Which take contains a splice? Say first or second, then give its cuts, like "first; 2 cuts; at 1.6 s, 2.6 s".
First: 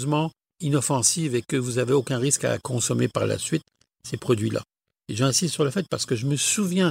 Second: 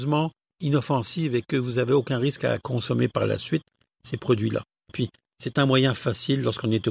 second; 1 cut; at 4.9 s